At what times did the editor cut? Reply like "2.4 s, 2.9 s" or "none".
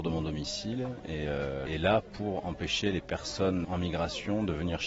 1.7 s, 3.6 s